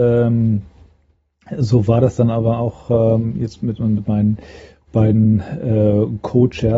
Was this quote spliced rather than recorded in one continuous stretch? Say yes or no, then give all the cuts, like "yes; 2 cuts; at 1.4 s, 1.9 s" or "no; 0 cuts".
no; 0 cuts